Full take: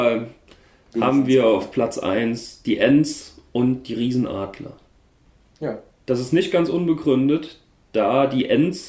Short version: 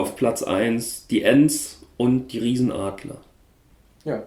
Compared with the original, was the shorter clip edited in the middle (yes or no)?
no